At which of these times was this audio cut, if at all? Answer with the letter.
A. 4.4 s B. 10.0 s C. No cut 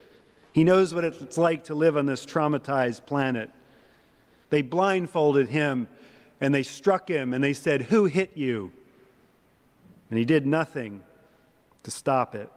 A